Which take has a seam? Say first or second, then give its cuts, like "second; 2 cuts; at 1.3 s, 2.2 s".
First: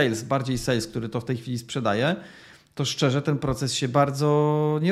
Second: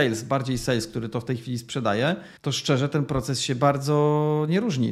second; 1 cut; at 2.4 s